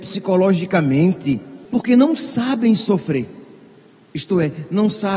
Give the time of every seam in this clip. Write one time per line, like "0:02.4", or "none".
0:01.7